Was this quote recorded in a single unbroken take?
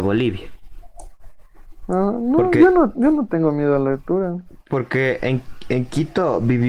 yes; 0 cuts

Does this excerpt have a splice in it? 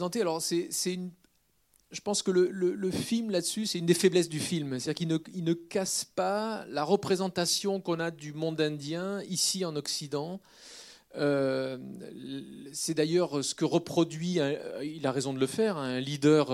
no; 0 cuts

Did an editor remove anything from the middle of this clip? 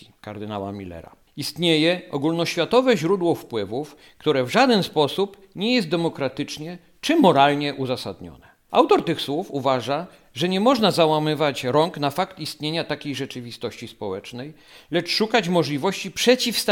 yes; 1 cut; at 1.2 s

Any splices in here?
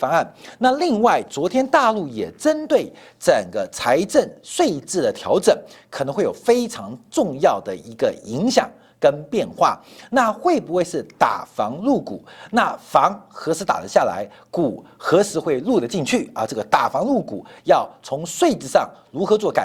no; 0 cuts

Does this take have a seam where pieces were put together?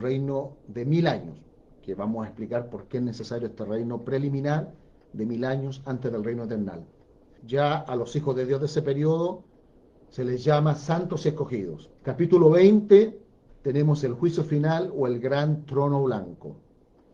yes; 3 cuts; at 7.4 s, 12.0 s, 13.5 s

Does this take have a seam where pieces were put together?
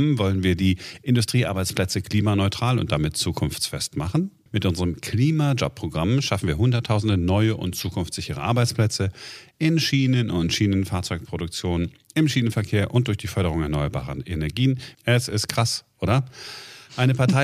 yes; 2 cuts; at 4.5 s, 14.9 s

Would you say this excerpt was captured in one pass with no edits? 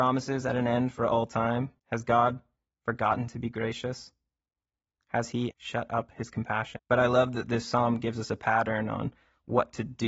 no; 3 cuts; at 1.8 s, 5.5 s, 6.8 s

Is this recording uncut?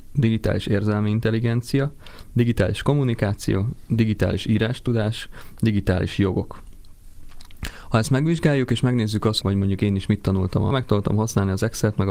no; 2 cuts; at 9.4 s, 10.7 s

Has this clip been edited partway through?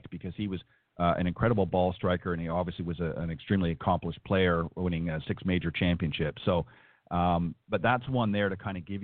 no; 0 cuts

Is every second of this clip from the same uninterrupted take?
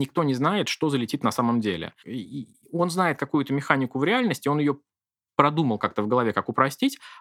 no; 1 cut; at 2.0 s

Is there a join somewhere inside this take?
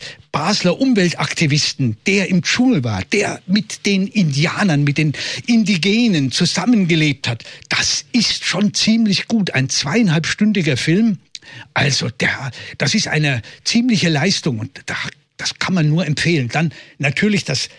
no; 0 cuts

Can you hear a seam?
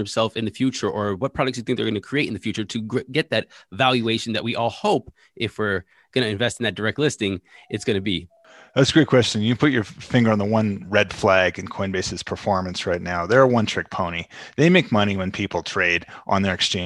no; 0 cuts

